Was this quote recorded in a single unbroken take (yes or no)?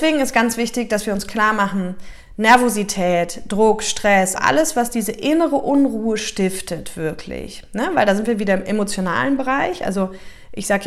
no